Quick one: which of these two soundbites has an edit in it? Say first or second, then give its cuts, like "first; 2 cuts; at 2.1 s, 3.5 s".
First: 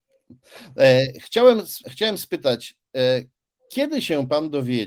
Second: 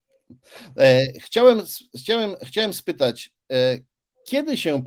first; 1 cut; at 1.8 s